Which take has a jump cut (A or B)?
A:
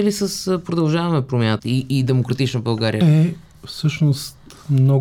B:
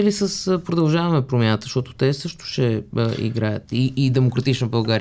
A